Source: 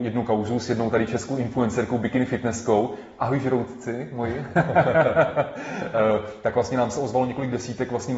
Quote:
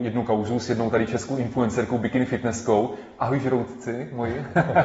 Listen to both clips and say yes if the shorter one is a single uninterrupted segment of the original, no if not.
yes